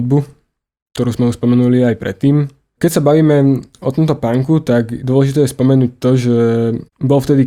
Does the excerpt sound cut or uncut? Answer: cut